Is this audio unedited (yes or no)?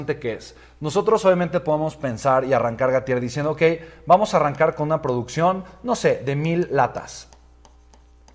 yes